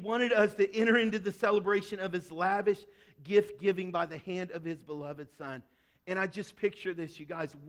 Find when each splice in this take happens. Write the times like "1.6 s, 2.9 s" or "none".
none